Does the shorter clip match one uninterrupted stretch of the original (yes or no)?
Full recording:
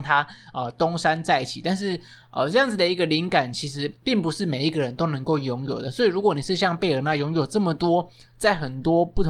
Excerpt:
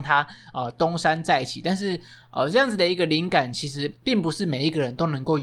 yes